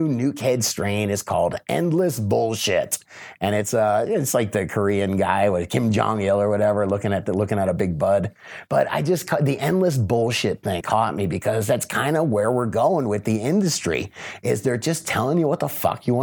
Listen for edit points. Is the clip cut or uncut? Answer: cut